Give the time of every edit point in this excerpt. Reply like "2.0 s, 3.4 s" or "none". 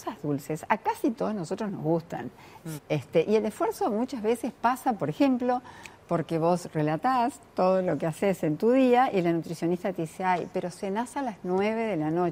2.8 s